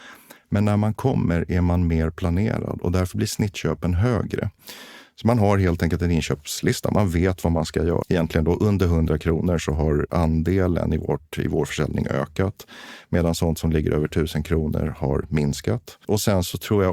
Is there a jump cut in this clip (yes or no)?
yes